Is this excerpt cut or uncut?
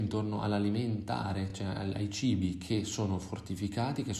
uncut